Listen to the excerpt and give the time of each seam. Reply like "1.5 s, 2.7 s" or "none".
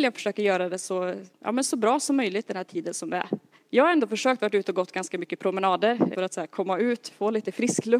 3.6 s, 6.1 s